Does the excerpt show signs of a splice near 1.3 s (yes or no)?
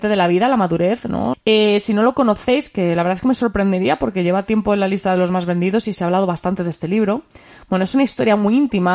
yes